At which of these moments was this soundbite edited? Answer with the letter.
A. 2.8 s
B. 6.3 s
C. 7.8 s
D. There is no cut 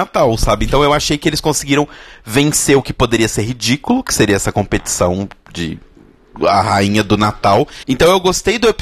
C